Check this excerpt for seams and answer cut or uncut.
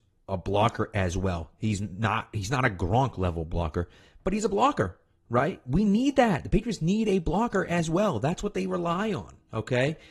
uncut